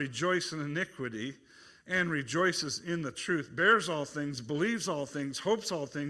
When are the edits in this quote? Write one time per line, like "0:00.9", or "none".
none